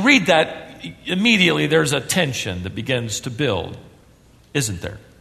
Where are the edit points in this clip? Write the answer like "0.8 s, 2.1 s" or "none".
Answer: none